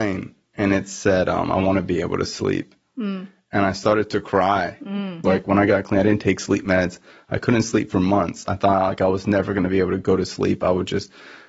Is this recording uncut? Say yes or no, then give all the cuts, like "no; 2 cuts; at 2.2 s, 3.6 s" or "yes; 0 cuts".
no; 1 cut; at 5.2 s